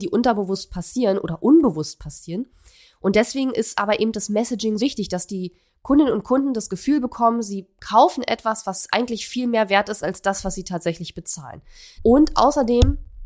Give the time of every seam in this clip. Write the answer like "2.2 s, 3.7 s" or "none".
4.8 s, 12.0 s

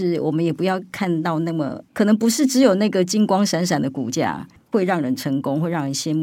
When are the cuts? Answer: 1.9 s

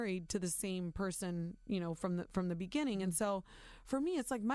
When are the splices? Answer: none

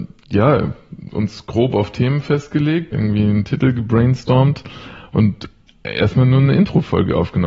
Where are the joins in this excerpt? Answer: 2.9 s

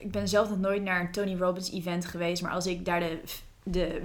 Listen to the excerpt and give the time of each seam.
none

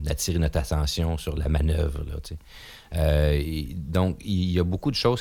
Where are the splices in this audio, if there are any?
none

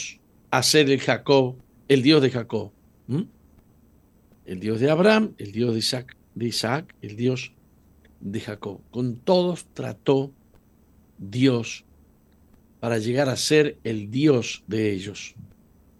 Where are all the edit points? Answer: none

